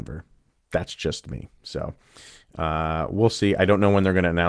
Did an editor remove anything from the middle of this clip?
no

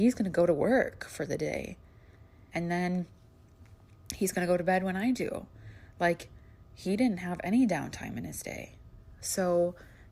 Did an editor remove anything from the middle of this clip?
yes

